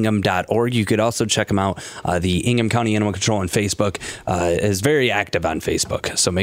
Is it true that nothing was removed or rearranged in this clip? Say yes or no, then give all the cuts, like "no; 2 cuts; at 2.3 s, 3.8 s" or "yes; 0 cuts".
yes; 0 cuts